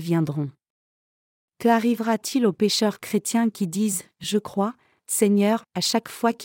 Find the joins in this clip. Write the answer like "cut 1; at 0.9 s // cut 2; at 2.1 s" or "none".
none